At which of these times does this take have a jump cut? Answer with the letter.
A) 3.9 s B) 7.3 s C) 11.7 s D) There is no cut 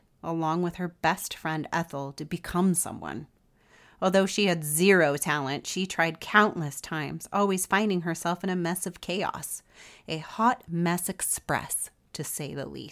D